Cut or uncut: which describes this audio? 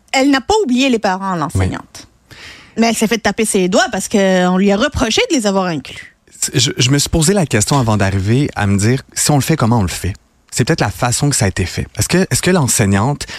uncut